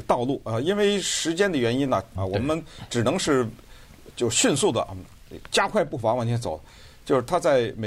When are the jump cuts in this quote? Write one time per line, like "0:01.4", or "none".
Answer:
0:02.2